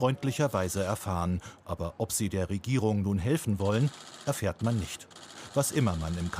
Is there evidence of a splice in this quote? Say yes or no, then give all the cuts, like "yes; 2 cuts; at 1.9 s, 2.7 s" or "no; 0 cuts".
no; 0 cuts